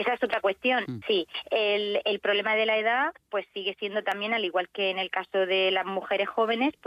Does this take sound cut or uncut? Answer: cut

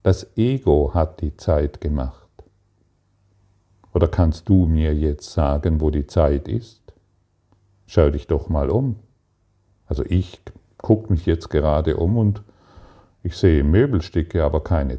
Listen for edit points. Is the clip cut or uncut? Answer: uncut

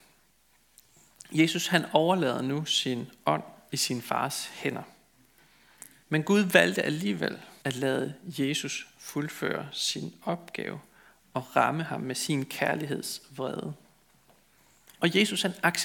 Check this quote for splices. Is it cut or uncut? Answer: cut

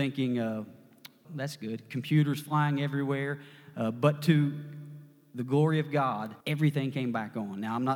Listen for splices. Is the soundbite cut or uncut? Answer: cut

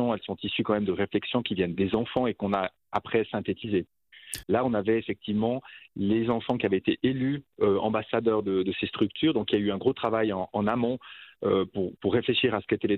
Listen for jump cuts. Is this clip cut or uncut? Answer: cut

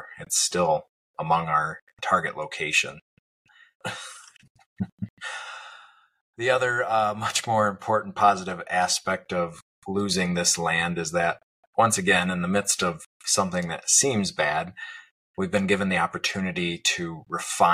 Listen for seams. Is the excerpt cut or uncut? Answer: cut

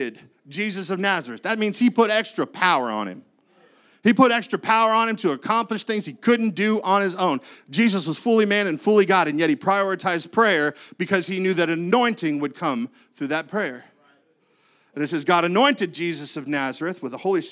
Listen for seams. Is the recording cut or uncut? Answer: uncut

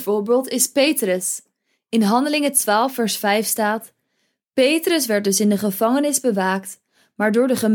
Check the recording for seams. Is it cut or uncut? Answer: uncut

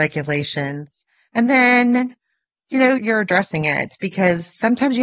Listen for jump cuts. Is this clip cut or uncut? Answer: cut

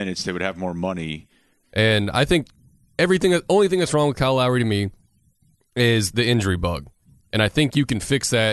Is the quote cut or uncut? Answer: cut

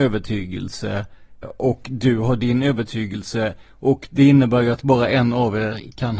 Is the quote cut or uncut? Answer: cut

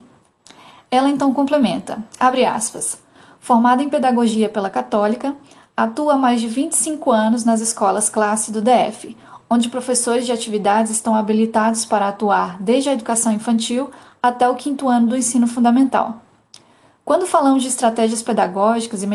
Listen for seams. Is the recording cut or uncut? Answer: uncut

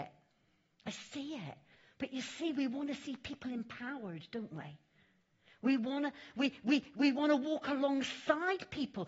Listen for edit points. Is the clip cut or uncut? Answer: uncut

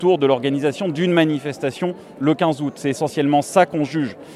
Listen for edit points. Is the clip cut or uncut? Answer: uncut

